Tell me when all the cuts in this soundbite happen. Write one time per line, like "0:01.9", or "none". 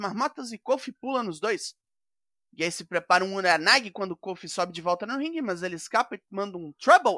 none